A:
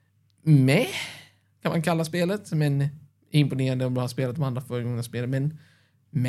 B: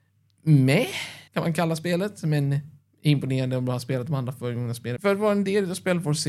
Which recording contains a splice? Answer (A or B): B